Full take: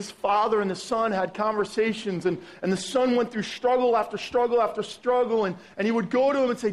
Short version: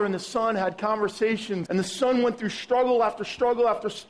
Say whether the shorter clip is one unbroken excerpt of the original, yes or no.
no